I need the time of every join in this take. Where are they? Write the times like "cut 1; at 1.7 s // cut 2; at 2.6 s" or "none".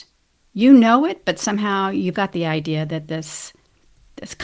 cut 1; at 2.1 s